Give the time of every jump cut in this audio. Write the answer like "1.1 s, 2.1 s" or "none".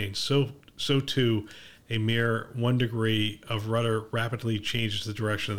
1.8 s